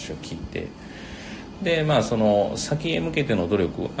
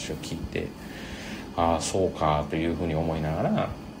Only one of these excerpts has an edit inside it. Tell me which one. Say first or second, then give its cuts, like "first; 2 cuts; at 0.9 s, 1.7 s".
first; 1 cut; at 1.5 s